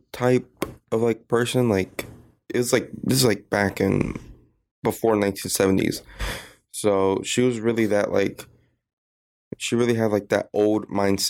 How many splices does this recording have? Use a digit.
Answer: 0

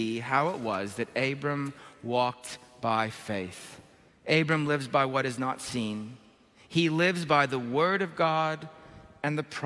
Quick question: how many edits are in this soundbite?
1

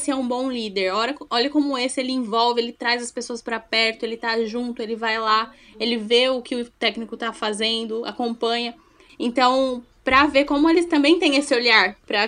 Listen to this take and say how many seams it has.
1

